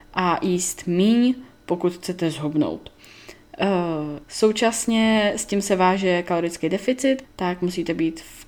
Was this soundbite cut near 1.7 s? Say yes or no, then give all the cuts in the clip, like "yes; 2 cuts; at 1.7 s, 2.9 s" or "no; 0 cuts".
no; 2 cuts; at 4.2 s, 7.2 s